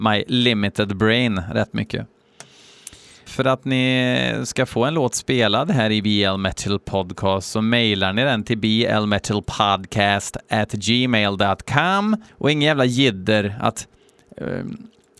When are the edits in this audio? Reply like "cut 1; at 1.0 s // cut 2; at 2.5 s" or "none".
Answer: cut 1; at 3.3 s // cut 2; at 12.3 s